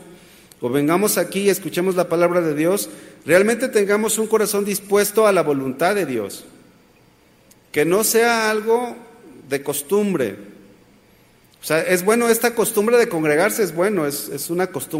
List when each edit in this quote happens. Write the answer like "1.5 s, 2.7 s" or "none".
none